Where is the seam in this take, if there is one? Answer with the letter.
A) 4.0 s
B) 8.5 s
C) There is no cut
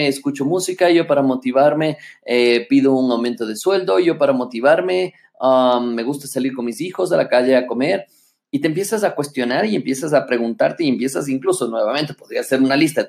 C